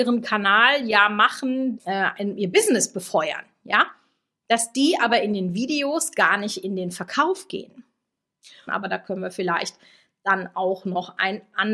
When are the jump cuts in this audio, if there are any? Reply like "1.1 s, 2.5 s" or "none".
1.8 s, 8.7 s